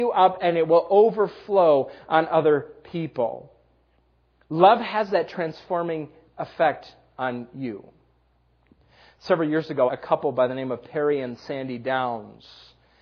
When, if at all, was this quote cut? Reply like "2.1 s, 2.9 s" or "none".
9.9 s